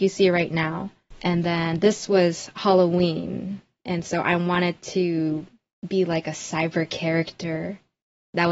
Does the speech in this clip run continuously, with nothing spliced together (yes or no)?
yes